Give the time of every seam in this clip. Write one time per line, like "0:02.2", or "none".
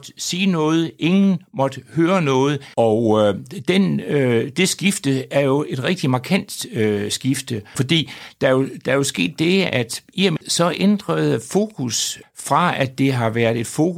0:02.7
0:07.7
0:10.4